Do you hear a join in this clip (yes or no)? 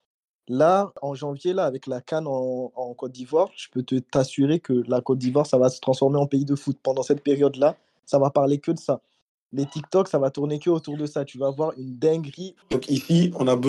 yes